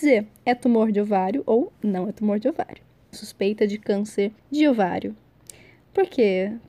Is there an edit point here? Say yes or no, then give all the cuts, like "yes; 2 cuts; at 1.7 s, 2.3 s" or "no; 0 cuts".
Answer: yes; 2 cuts; at 3.1 s, 4.4 s